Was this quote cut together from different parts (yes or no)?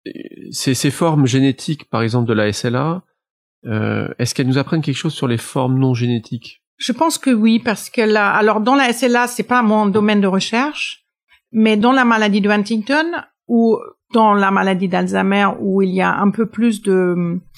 yes